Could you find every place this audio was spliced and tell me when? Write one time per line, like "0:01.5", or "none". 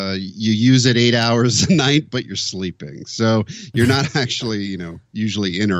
none